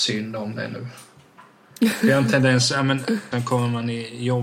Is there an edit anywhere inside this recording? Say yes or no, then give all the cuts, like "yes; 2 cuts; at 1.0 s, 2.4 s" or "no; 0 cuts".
yes; 1 cut; at 3.3 s